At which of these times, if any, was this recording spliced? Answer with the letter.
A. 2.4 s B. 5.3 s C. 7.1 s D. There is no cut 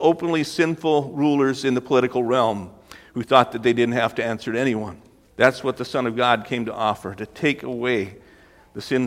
B